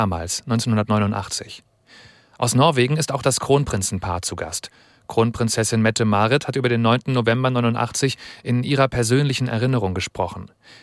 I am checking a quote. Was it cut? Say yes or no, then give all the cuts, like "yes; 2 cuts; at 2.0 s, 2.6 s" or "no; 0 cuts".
no; 0 cuts